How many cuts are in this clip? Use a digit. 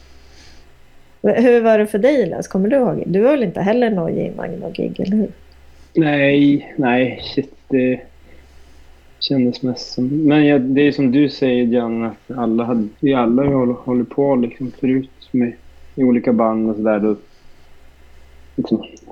1